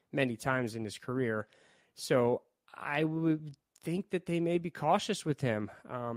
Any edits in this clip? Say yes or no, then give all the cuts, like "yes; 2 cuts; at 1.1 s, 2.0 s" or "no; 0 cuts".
no; 0 cuts